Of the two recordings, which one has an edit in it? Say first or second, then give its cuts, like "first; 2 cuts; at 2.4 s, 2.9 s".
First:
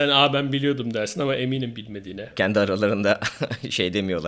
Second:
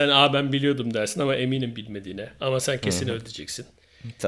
first; 1 cut; at 2.3 s